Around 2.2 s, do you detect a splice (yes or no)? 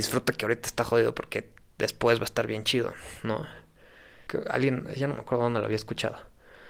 no